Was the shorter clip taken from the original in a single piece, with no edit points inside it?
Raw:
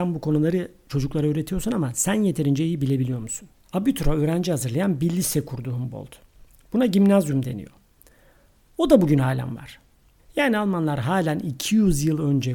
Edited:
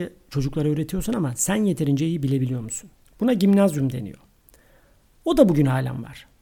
no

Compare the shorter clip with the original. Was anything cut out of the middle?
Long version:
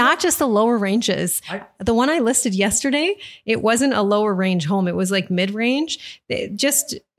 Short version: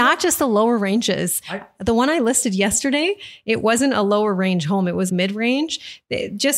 yes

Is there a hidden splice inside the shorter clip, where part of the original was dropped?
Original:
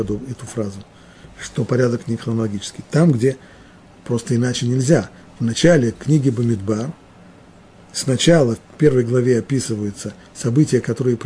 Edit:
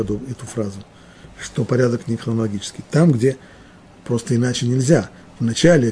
no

